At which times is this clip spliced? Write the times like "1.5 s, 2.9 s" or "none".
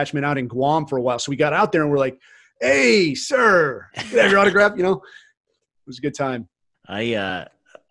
6.7 s